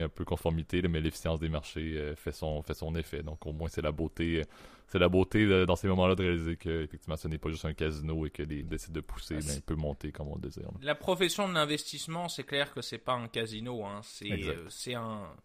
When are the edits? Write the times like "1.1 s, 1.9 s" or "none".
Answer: 8.6 s